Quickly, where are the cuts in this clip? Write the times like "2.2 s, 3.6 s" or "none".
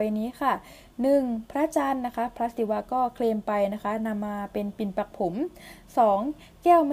none